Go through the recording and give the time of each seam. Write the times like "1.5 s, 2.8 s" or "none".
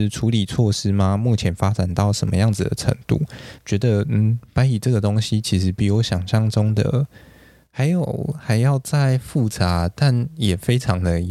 3.6 s